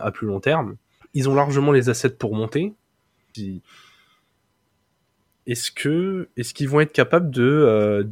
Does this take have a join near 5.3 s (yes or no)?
no